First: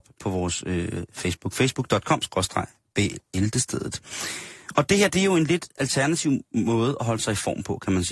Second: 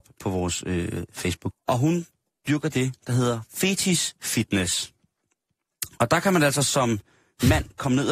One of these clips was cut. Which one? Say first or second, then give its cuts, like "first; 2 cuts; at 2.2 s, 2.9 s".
second; 1 cut; at 1.5 s